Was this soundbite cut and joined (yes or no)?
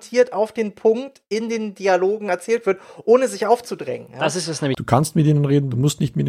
yes